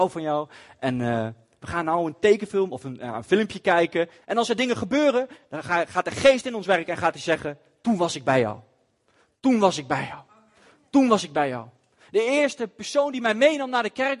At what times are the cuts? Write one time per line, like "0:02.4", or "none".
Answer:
0:04.2

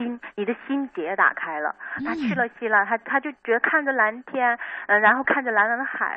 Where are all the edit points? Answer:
none

